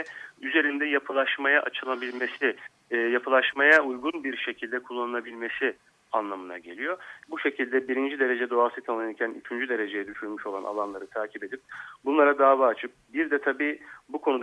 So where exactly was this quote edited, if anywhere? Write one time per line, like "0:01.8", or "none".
0:07.2